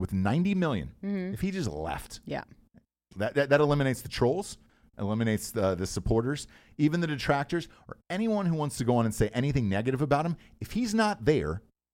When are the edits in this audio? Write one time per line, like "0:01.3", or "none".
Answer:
none

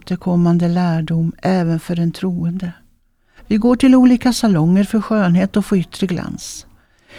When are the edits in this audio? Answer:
0:03.4

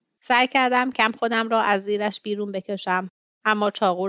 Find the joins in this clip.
0:00.9

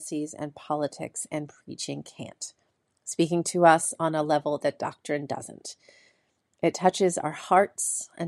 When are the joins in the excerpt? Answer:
none

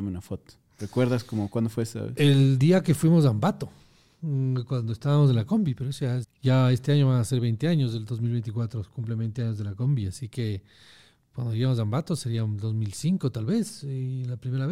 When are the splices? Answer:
0:06.2

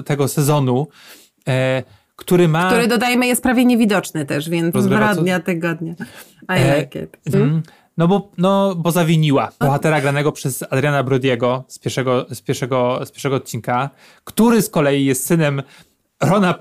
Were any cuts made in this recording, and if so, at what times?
0:04.7
0:07.3
0:09.6

